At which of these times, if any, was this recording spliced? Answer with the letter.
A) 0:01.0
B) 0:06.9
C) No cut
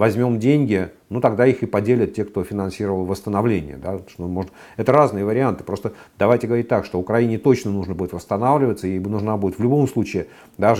C